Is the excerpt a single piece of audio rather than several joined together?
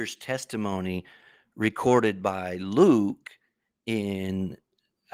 yes; 0 cuts

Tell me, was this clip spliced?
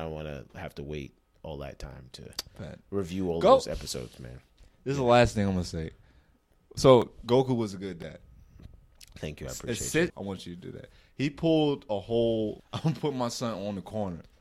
yes; 2 cuts; at 10.1 s, 12.6 s

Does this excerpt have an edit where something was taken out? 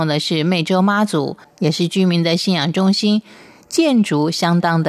no; 0 cuts

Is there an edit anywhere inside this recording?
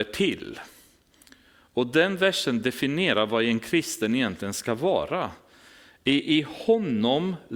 no; 0 cuts

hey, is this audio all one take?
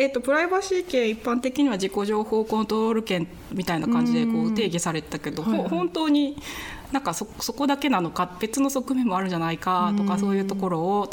yes; 0 cuts

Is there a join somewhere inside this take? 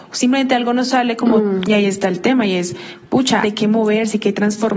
yes; 2 cuts; at 1.6 s, 3.4 s

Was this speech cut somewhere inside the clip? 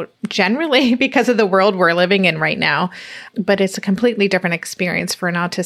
no; 0 cuts

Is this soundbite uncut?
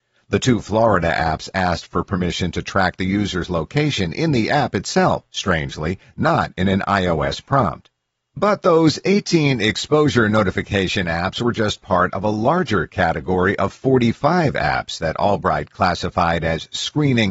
yes; 0 cuts

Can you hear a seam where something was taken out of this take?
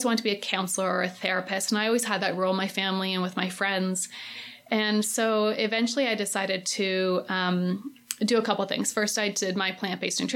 no; 0 cuts

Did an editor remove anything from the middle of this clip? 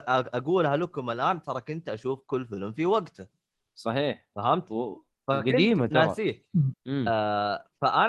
yes; 1 cut; at 6.7 s

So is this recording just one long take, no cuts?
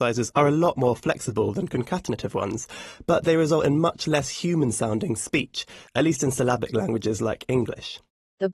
yes; 0 cuts

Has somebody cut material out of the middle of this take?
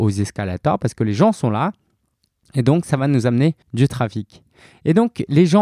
yes; 1 cut; at 3.6 s

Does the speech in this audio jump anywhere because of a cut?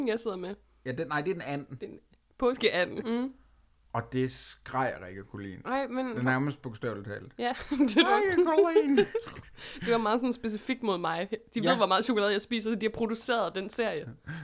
yes; 1 cut; at 3.0 s

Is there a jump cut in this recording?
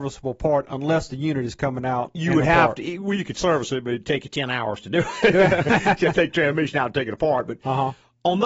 no; 0 cuts

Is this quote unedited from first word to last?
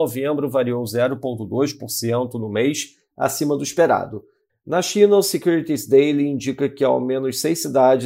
no; 1 cut; at 4.5 s

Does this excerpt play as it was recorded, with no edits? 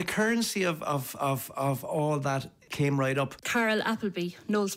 yes; 0 cuts

